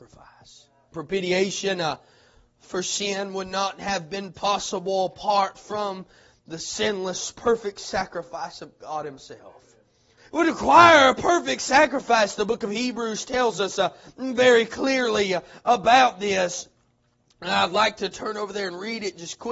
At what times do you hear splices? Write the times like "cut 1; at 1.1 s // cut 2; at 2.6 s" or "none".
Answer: cut 1; at 0.9 s // cut 2; at 10.2 s